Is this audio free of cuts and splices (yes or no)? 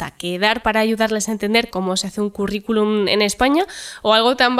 yes